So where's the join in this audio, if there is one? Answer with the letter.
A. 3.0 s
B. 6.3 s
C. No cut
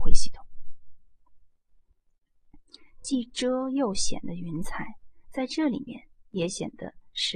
C